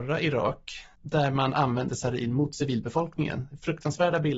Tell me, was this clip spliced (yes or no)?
yes